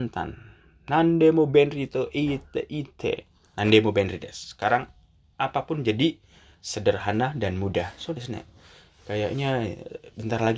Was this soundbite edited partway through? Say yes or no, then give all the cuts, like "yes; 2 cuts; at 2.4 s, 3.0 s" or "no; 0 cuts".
no; 0 cuts